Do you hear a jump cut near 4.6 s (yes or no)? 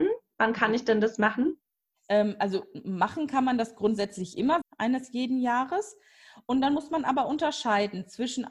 yes